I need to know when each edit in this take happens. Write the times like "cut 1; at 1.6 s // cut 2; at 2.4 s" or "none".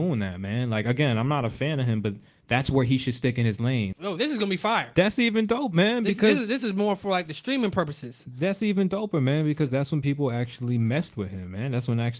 cut 1; at 3.9 s